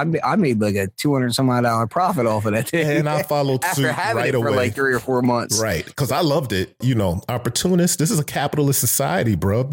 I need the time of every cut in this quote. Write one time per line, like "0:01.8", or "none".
0:06.8